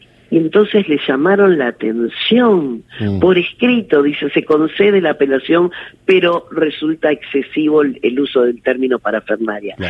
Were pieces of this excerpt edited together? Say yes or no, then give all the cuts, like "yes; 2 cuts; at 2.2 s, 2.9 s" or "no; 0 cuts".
no; 0 cuts